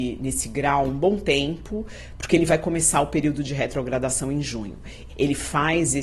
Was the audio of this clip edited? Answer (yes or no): yes